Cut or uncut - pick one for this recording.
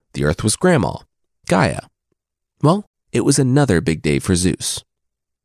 cut